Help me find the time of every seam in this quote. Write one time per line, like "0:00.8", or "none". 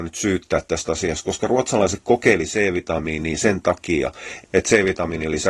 0:04.4